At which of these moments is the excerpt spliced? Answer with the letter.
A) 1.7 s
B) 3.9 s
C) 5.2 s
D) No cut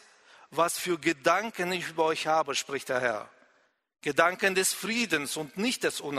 D